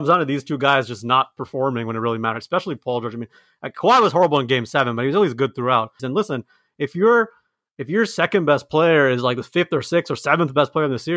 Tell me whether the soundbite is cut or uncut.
cut